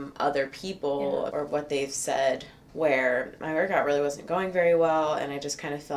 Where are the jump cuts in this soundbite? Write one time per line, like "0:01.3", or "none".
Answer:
0:01.3
0:02.7